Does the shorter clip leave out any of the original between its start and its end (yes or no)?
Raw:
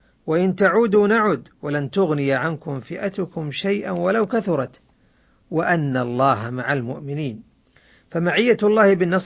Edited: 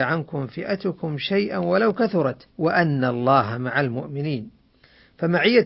yes